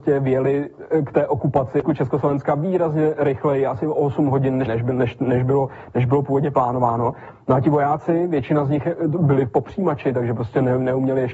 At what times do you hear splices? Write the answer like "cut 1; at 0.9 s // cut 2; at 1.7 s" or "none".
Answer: none